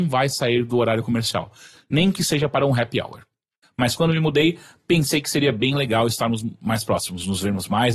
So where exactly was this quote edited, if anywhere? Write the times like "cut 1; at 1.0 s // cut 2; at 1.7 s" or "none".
cut 1; at 3.6 s

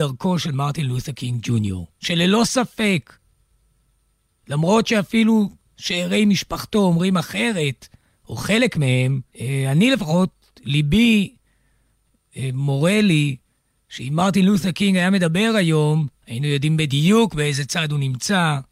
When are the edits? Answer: cut 1; at 9.3 s // cut 2; at 16.1 s

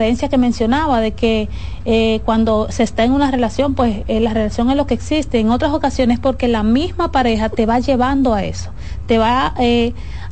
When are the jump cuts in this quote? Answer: none

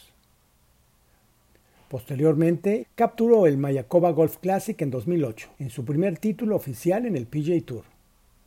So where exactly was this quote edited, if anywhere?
cut 1; at 1.7 s // cut 2; at 2.8 s // cut 3; at 5.5 s

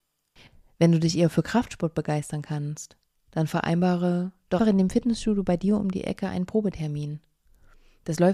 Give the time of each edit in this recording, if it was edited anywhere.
cut 1; at 4.6 s

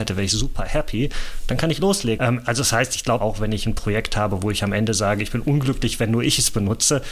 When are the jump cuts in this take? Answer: cut 1; at 2.2 s // cut 2; at 3.2 s

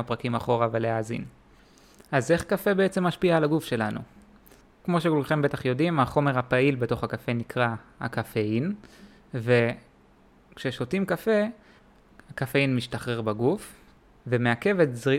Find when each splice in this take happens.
none

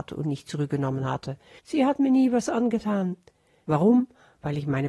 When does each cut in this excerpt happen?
cut 1; at 1.6 s // cut 2; at 3.6 s

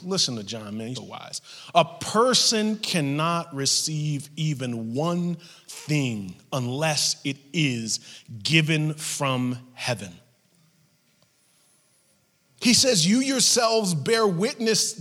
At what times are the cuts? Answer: cut 1; at 0.9 s

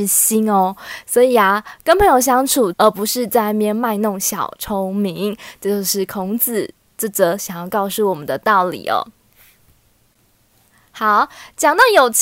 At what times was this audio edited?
cut 1; at 2.7 s

